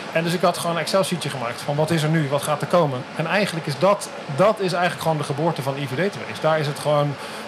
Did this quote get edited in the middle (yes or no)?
no